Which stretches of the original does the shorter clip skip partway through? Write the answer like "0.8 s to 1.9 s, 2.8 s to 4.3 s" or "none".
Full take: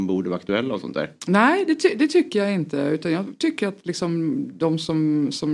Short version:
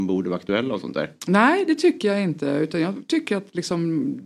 1.8 s to 2.1 s